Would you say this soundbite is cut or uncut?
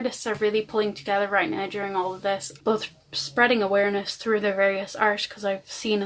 cut